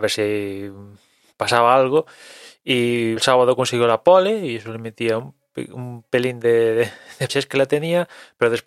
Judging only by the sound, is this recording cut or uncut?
cut